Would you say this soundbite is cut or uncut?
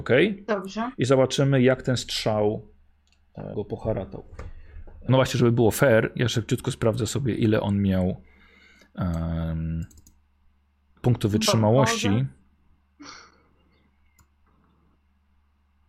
cut